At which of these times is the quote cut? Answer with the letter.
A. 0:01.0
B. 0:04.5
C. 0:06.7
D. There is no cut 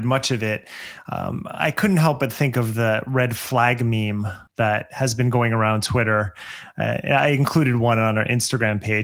B